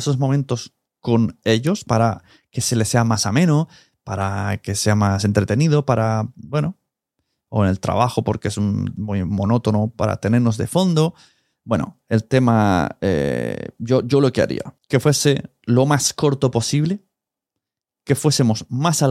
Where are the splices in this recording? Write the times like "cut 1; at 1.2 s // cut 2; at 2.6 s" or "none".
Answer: cut 1; at 11.6 s // cut 2; at 14.8 s